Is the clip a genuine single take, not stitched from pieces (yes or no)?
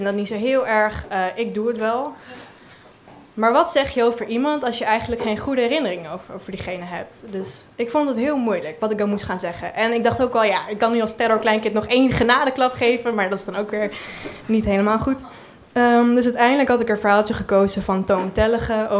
yes